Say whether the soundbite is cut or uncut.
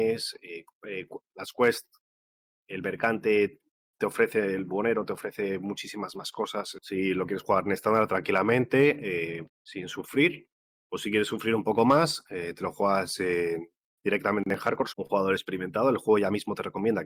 cut